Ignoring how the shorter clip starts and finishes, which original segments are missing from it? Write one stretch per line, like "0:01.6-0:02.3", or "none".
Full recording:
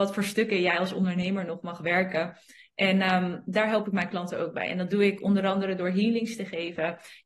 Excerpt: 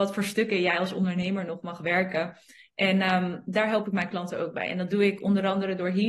none